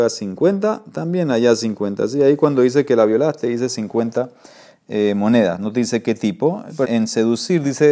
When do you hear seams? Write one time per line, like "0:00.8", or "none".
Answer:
0:06.8